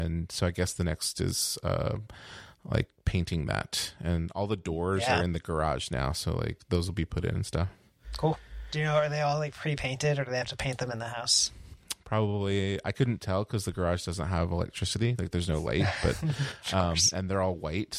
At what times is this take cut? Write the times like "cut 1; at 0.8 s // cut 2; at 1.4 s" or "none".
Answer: none